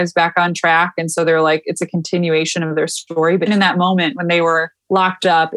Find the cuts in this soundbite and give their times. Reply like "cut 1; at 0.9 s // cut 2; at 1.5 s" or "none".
cut 1; at 3.5 s